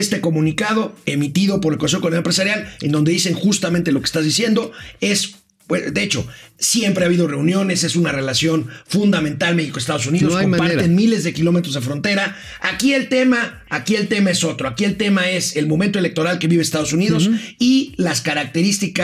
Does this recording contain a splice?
no; 0 cuts

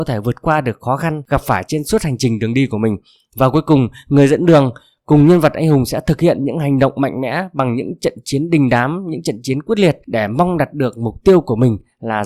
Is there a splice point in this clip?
no; 0 cuts

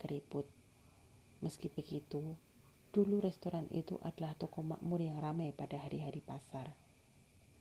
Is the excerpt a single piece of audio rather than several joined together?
yes; 0 cuts

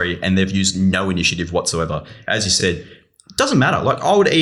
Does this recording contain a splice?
no; 0 cuts

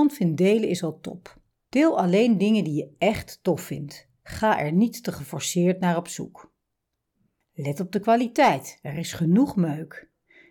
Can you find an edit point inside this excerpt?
no; 0 cuts

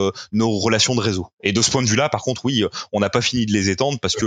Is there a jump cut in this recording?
no; 0 cuts

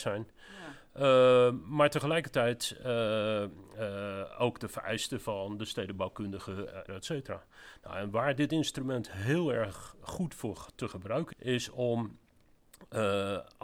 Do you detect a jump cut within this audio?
yes; 2 cuts; at 6.9 s, 11.3 s

